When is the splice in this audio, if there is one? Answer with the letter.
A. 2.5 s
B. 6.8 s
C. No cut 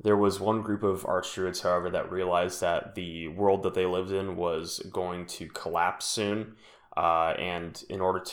C